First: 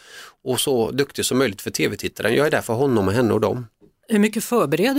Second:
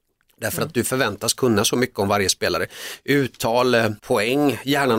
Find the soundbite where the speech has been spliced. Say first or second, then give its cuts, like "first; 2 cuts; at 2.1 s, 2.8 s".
second; 1 cut; at 4.0 s